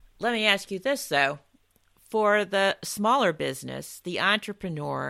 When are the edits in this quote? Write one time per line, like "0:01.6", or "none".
0:04.0

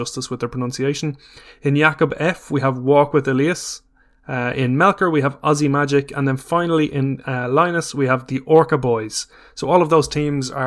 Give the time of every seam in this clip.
none

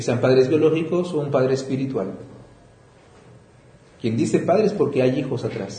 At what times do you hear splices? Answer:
none

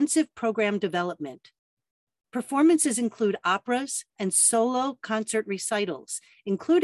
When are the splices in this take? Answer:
0:02.2
0:04.1

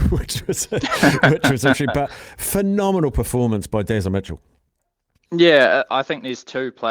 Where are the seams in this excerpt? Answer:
none

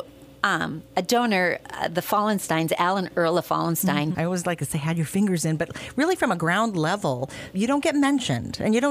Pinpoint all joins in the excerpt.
0:04.1
0:07.5

